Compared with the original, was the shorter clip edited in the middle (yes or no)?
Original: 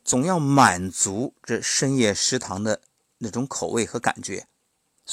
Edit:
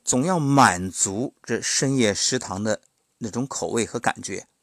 no